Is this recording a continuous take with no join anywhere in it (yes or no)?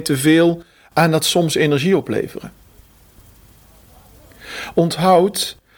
yes